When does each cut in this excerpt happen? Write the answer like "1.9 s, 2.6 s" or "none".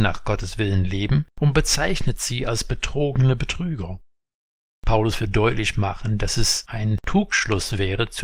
none